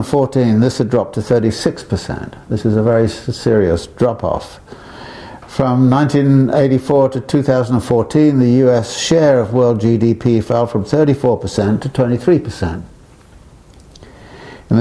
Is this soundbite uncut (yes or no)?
yes